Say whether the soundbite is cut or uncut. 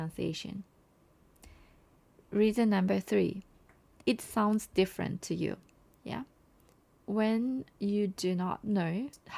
cut